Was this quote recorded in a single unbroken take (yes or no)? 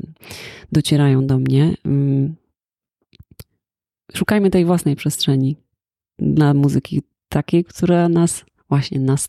yes